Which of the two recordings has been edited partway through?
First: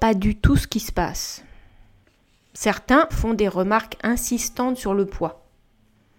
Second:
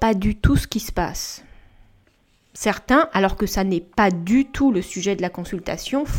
first; 1 cut; at 3.1 s

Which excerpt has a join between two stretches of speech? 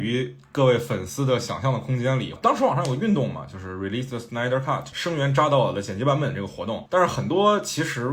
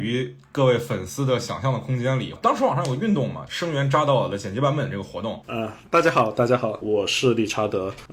second; 2 cuts; at 3.5 s, 5.4 s

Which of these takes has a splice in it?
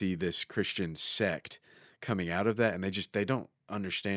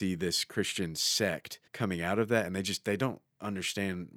second; 1 cut; at 1.7 s

